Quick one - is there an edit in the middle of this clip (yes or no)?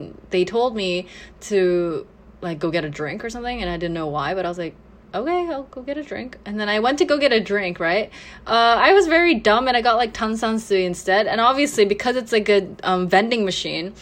no